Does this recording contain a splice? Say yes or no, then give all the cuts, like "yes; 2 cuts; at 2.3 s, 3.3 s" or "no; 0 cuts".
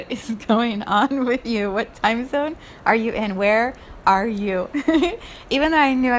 no; 0 cuts